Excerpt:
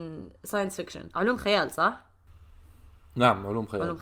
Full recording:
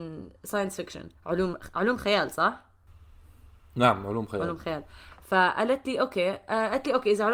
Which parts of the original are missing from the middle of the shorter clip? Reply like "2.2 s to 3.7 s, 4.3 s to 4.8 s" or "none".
1.1 s to 1.7 s